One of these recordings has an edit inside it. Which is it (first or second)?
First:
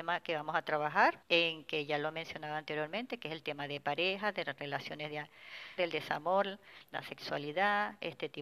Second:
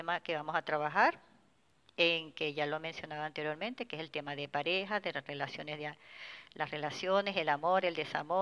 first